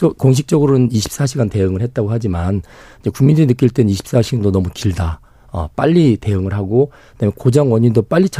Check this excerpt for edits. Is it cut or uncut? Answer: uncut